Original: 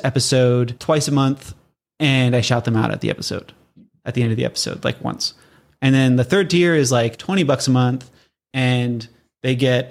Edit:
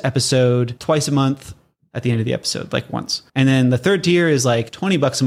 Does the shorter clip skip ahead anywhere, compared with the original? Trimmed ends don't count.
yes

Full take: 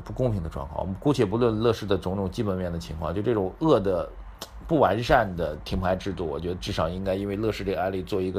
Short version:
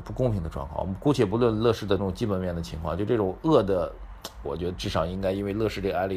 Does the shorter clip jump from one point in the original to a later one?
yes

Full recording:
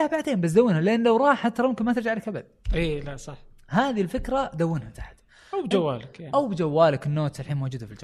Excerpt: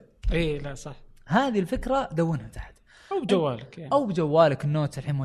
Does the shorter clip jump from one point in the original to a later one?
no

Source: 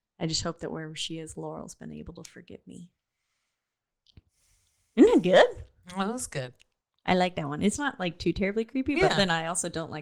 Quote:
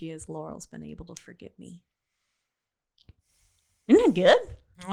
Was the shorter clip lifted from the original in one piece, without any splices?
yes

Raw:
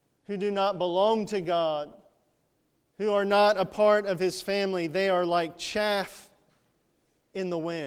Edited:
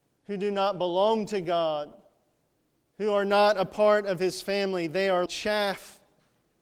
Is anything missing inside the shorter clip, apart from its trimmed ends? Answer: yes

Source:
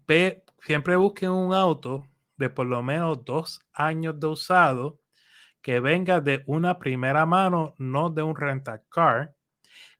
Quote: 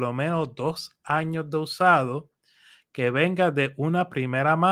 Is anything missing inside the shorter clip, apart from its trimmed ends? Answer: no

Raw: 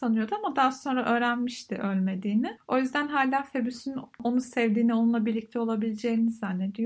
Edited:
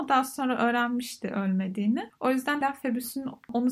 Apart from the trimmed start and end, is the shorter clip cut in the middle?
yes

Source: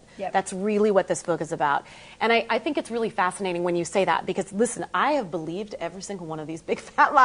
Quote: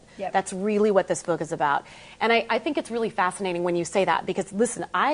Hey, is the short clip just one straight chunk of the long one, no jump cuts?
yes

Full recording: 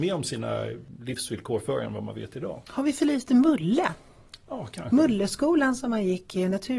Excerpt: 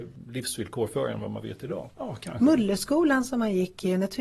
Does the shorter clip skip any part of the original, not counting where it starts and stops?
yes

